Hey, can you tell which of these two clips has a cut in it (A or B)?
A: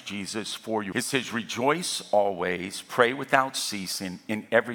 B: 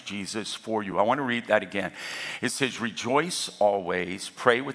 A